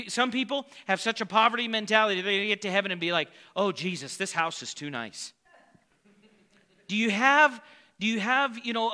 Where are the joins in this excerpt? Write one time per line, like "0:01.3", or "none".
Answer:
none